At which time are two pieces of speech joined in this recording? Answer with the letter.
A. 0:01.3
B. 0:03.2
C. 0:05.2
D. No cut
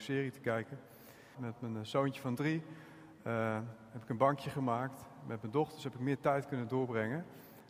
A